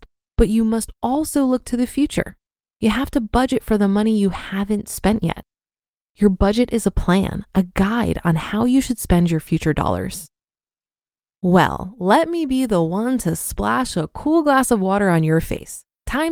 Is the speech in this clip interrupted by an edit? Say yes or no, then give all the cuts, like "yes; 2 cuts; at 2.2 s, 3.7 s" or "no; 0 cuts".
yes; 1 cut; at 11.2 s